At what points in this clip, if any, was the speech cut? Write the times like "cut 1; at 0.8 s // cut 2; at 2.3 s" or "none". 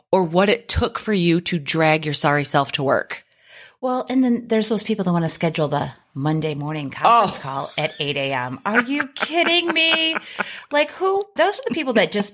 cut 1; at 11.4 s